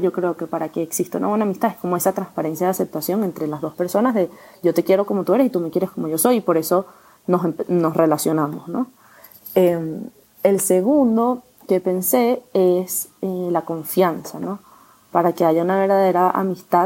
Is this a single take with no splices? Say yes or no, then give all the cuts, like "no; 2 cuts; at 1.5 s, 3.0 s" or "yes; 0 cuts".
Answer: yes; 0 cuts